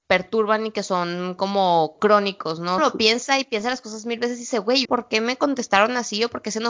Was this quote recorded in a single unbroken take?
no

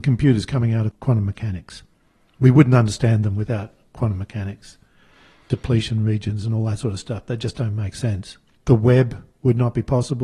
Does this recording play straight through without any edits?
no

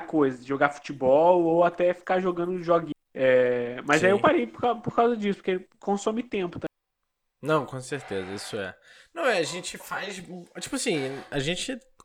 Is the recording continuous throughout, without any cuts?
no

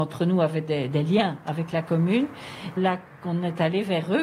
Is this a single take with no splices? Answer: no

